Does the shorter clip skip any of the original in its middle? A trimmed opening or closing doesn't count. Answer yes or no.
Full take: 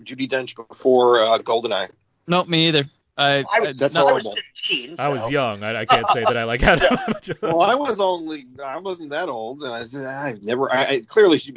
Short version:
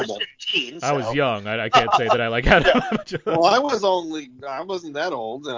no